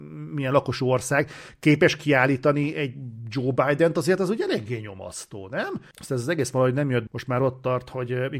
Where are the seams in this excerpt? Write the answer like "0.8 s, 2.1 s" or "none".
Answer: 5.9 s, 7.1 s